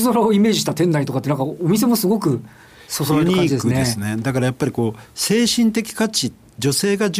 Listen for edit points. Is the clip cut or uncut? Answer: uncut